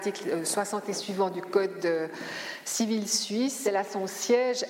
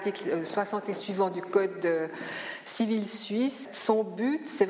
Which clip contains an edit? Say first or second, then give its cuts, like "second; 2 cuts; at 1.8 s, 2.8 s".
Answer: second; 1 cut; at 3.7 s